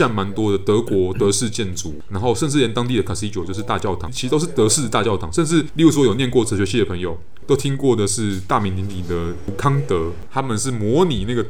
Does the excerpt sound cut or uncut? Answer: cut